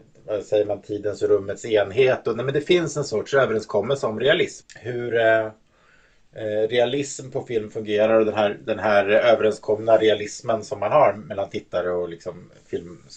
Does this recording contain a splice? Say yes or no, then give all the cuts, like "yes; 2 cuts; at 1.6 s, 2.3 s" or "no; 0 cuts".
yes; 1 cut; at 4.6 s